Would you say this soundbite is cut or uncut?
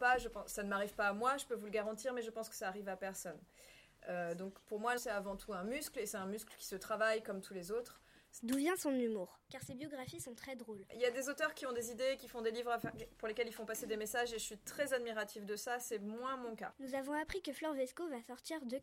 cut